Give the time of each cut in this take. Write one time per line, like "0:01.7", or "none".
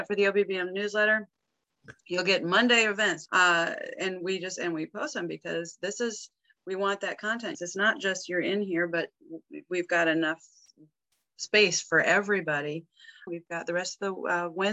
0:03.3
0:07.5
0:13.3